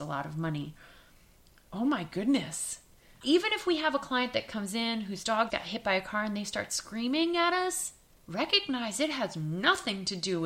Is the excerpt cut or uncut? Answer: cut